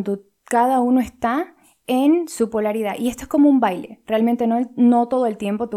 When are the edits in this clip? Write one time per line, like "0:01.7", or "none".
none